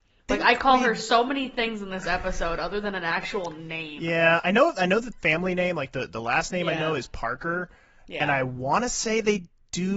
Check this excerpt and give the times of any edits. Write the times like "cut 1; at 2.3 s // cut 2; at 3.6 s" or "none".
none